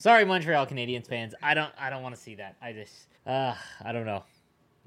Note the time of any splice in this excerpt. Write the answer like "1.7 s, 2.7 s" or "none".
3.2 s